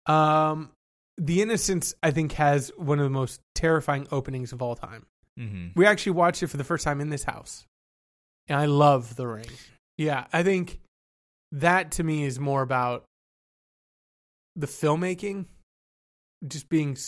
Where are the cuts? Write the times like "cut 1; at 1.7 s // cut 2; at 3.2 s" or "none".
cut 1; at 8.5 s // cut 2; at 9.7 s